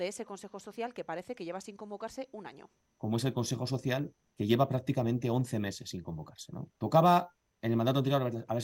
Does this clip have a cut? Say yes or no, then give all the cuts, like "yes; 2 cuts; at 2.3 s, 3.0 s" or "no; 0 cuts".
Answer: yes; 1 cut; at 6.7 s